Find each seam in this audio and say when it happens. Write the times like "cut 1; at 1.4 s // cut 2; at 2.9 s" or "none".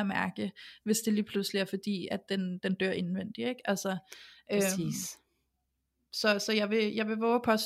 none